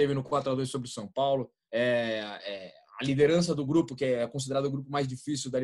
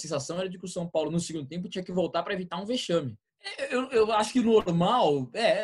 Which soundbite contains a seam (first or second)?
second